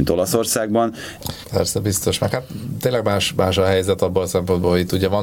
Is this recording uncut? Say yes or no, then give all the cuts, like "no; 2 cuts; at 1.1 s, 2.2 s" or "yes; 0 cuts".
no; 1 cut; at 1.4 s